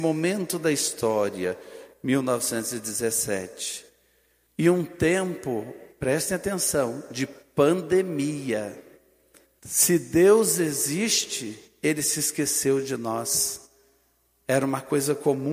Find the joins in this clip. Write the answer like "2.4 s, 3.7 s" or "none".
4.5 s, 9.6 s

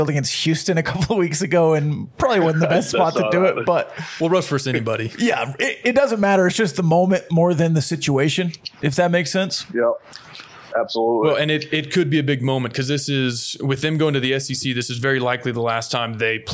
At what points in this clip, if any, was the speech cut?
none

